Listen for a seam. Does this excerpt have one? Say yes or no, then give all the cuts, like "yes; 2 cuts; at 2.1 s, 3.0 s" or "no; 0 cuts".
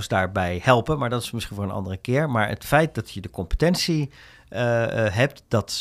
no; 0 cuts